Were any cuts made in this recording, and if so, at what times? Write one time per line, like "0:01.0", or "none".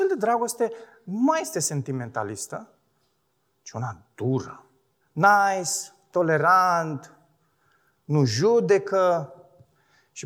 0:05.0